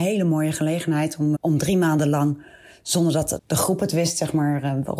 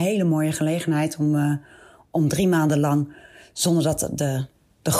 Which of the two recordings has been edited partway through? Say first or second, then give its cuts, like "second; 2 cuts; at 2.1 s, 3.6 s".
first; 2 cuts; at 1.3 s, 3.4 s